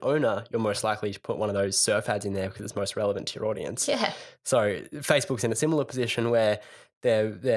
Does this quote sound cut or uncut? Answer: uncut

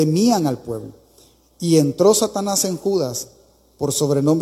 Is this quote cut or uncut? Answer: uncut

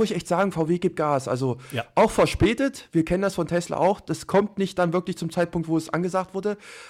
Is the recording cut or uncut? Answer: uncut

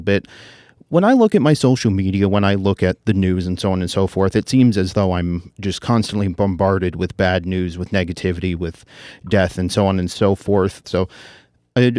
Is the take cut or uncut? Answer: cut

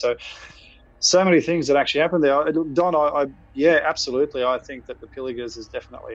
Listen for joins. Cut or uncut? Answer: uncut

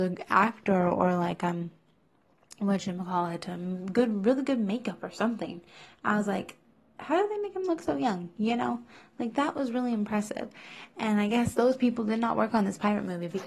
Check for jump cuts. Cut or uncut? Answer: uncut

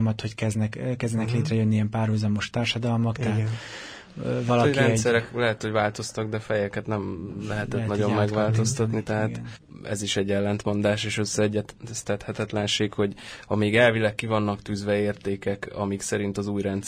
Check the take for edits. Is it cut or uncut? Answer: uncut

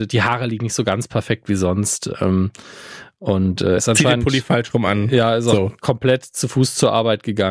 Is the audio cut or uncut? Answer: cut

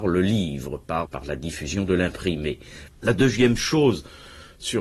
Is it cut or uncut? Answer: cut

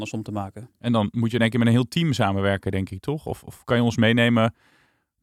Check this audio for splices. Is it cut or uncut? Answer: uncut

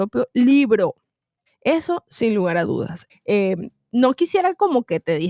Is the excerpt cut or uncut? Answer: cut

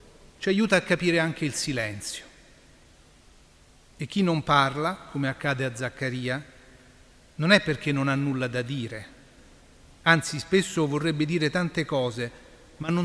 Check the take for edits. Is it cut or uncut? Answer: uncut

